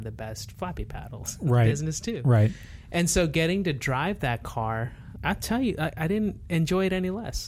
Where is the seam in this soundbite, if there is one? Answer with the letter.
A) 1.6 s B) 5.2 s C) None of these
B